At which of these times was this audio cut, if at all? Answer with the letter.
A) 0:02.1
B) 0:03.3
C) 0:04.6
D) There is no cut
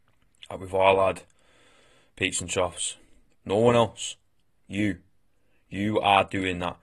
B